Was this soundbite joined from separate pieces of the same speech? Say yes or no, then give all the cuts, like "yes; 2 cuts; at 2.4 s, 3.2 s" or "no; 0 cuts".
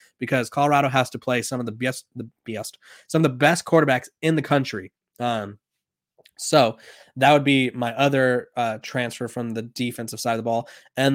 no; 0 cuts